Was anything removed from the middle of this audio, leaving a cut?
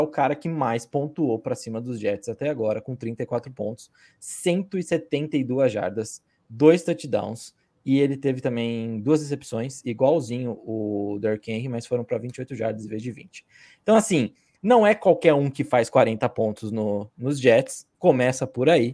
no; 0 cuts

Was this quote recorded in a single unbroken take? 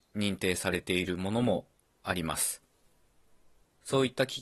yes; 0 cuts

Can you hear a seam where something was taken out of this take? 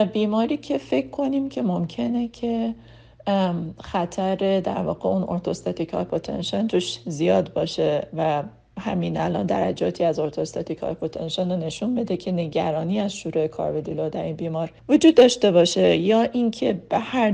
yes; 1 cut; at 14.8 s

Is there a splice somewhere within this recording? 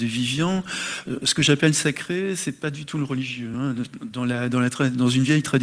no; 0 cuts

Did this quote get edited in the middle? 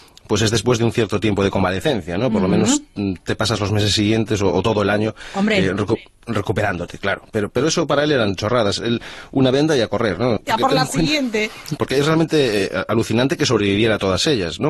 yes; 2 cuts; at 10.4 s, 11.8 s

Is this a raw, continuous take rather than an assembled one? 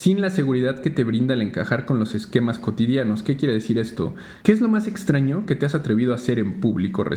no; 1 cut; at 4.4 s

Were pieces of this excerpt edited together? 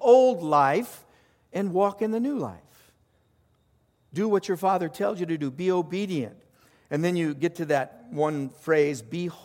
no; 0 cuts

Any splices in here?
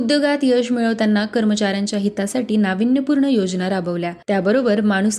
yes; 1 cut; at 4.2 s

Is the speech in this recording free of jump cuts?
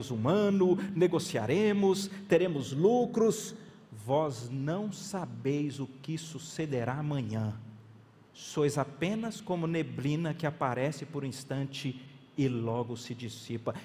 no; 1 cut; at 8.3 s

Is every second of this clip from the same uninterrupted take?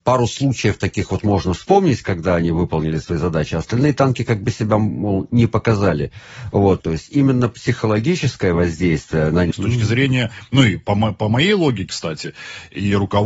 no; 3 cuts; at 6.8 s, 9.5 s, 11.9 s

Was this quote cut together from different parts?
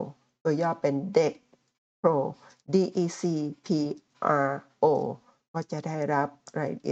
no; 0 cuts

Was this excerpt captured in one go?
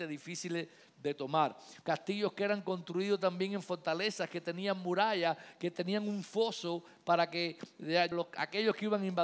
no; 2 cuts; at 1.8 s, 8.1 s

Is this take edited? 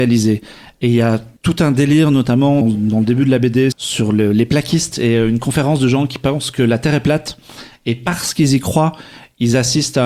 yes; 3 cuts; at 1.4 s, 2.6 s, 3.7 s

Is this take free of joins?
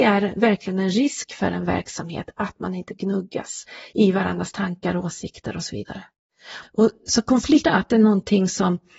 no; 2 cuts; at 6.6 s, 7.6 s

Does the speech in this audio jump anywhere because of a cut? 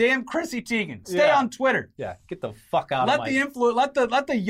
no; 0 cuts

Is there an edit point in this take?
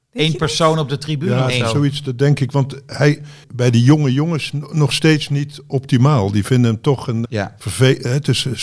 yes; 2 cuts; at 3.4 s, 7.2 s

